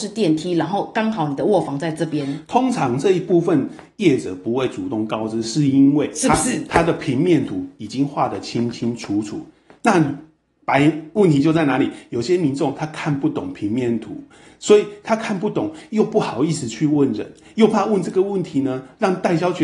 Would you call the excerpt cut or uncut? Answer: uncut